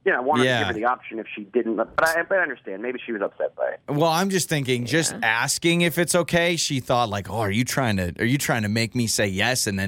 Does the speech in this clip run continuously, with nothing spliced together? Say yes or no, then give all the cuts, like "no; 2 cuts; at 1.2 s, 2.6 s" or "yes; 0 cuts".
yes; 0 cuts